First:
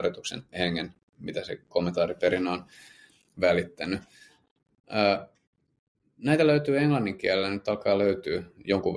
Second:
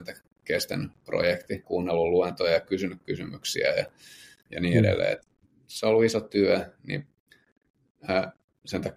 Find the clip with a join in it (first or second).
second